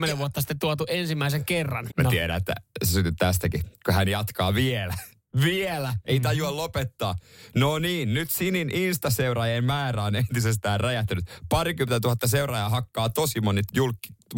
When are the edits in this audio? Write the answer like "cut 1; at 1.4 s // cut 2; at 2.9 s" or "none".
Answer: cut 1; at 1.9 s

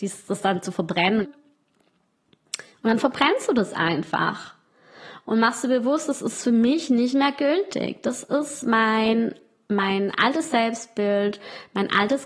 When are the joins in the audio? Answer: cut 1; at 1.2 s

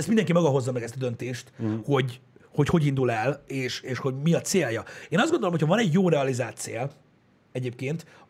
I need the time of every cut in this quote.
none

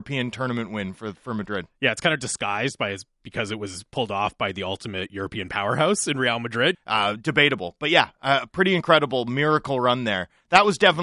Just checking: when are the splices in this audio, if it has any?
cut 1; at 6.7 s

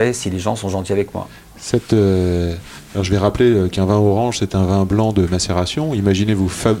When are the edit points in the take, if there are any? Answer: none

